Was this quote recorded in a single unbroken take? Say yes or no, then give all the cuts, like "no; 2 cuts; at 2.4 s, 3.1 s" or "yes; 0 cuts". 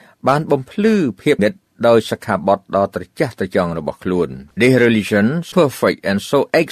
no; 3 cuts; at 1.4 s, 4.5 s, 5.5 s